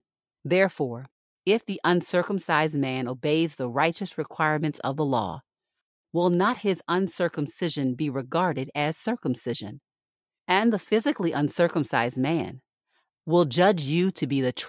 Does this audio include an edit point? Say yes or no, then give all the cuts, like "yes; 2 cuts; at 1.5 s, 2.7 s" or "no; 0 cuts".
yes; 1 cut; at 13.1 s